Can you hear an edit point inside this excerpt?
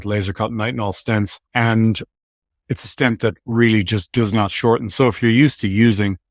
yes; 1 cut; at 1.5 s

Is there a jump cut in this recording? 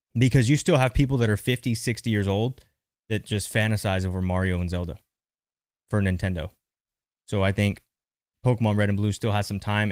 no; 0 cuts

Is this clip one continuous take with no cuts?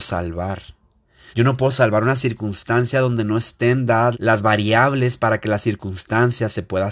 no; 2 cuts; at 1.3 s, 4.1 s

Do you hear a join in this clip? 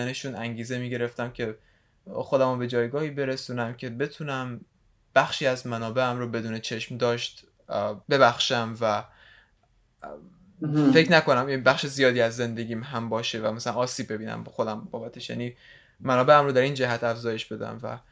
yes; 1 cut; at 8.0 s

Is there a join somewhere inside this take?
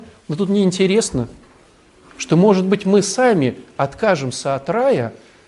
yes; 1 cut; at 2.1 s

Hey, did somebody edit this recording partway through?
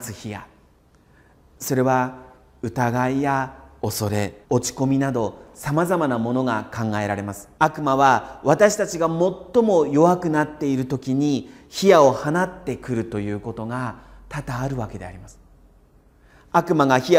yes; 2 cuts; at 4.4 s, 7.6 s

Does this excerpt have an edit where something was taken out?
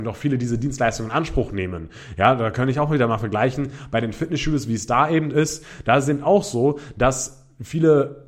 no; 0 cuts

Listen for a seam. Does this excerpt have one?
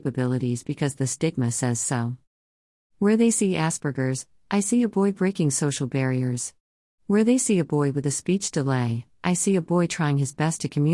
no; 0 cuts

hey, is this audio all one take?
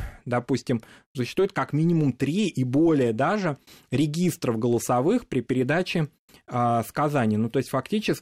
yes; 0 cuts

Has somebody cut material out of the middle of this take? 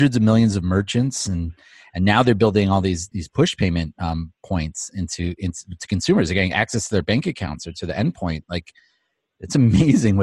no; 0 cuts

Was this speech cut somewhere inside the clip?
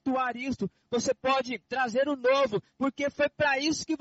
yes; 1 cut; at 2.7 s

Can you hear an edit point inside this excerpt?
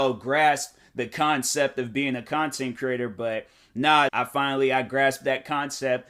yes; 1 cut; at 4.1 s

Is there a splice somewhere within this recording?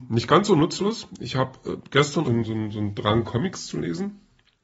yes; 1 cut; at 2.2 s

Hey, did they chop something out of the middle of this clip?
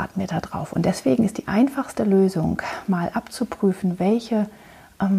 no; 0 cuts

